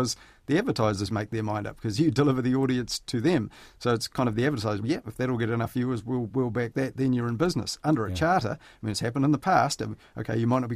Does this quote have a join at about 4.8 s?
yes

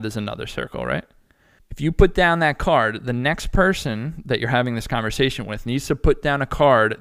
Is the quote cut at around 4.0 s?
no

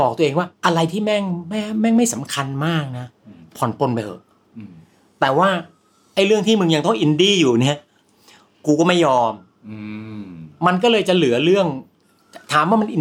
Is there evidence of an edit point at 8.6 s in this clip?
no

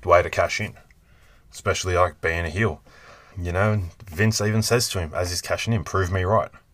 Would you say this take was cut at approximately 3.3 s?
yes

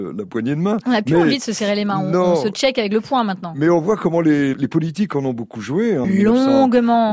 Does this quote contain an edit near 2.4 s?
no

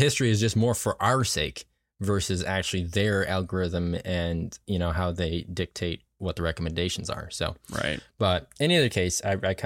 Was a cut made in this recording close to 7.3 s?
no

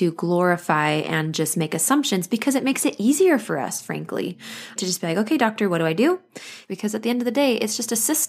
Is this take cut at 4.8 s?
yes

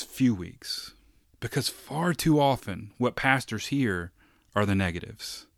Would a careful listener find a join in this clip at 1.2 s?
yes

